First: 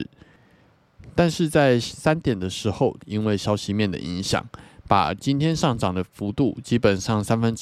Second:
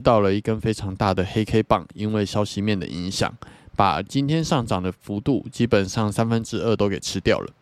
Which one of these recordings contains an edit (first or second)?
first